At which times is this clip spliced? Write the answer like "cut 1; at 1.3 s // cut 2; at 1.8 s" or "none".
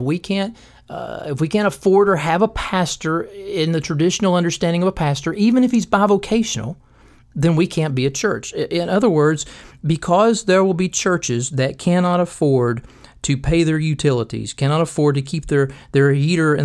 none